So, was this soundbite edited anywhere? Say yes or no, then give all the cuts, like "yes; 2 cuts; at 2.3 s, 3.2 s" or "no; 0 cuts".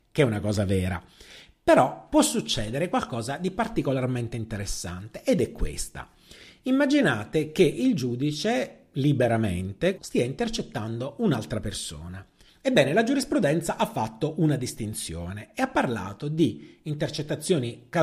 yes; 2 cuts; at 10.0 s, 12.5 s